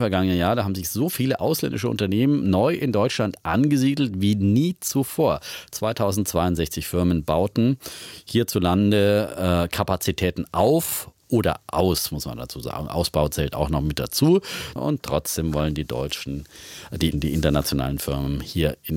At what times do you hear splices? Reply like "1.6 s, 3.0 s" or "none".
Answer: 14.8 s, 17.1 s